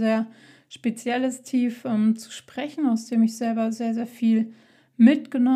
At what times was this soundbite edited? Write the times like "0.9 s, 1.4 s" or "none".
none